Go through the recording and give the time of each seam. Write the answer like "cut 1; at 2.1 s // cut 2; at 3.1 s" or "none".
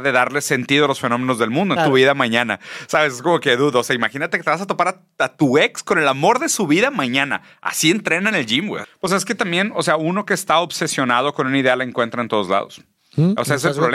cut 1; at 1.8 s // cut 2; at 8.8 s